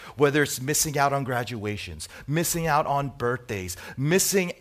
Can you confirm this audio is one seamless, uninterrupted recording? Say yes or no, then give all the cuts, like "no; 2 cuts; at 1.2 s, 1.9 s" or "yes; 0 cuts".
yes; 0 cuts